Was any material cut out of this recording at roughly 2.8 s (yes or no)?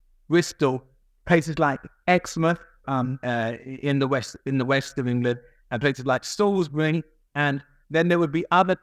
yes